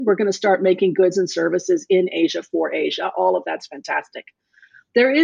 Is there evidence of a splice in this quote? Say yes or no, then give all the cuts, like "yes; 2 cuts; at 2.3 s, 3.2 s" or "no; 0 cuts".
no; 0 cuts